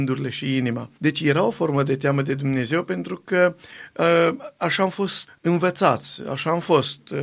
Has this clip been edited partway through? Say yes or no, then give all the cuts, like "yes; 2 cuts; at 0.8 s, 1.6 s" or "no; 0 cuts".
yes; 2 cuts; at 1.0 s, 5.3 s